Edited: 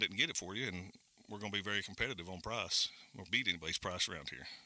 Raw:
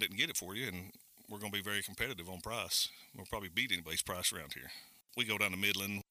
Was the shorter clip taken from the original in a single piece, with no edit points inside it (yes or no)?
no